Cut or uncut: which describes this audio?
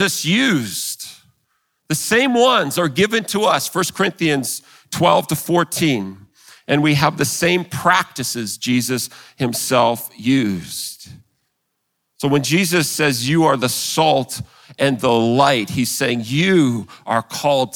uncut